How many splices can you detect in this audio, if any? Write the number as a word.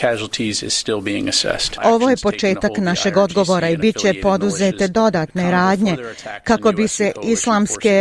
one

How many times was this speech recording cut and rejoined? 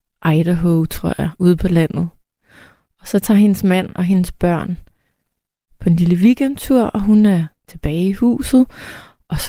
zero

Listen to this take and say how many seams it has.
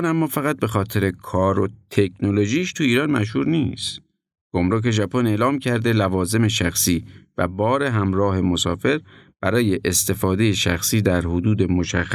one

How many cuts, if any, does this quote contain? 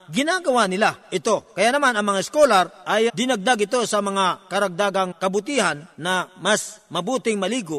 two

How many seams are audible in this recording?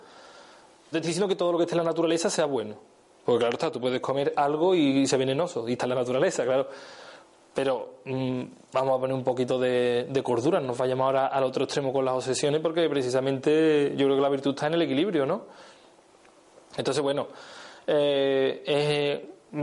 one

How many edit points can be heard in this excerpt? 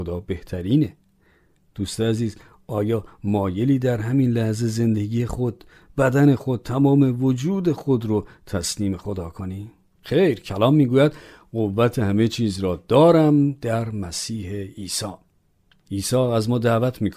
one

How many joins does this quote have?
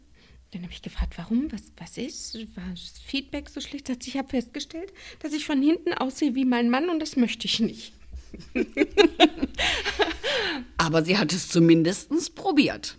zero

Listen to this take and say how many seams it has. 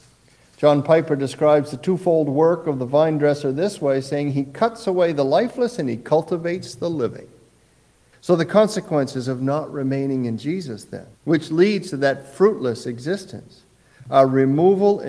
two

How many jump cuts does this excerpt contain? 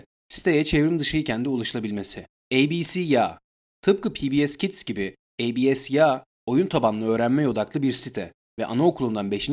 one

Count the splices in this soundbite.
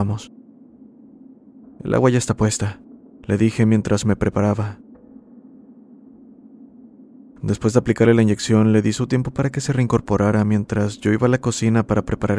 one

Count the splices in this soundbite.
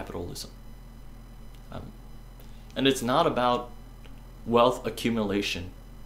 two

